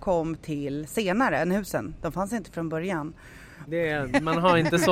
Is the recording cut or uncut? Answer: cut